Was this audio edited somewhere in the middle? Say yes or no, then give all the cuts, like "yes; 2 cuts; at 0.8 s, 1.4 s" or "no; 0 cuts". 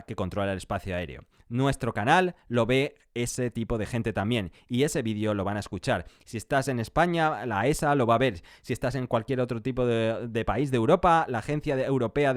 no; 0 cuts